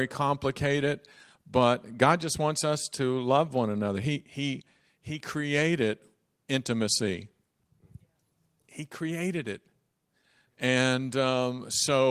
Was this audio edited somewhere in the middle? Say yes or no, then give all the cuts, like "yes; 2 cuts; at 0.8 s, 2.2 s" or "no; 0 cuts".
no; 0 cuts